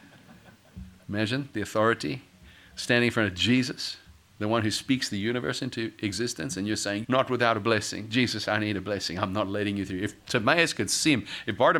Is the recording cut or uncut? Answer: cut